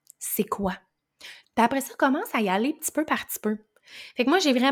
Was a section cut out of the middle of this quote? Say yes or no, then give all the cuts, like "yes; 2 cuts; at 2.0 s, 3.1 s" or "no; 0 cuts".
yes; 1 cut; at 1.4 s